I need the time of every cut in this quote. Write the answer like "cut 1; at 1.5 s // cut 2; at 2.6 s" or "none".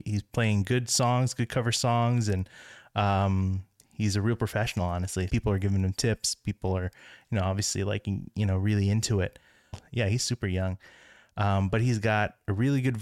cut 1; at 5.3 s // cut 2; at 9.7 s